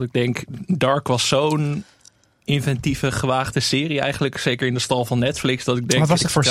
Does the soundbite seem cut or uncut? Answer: uncut